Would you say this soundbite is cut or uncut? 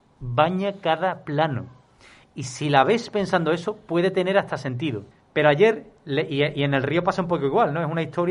cut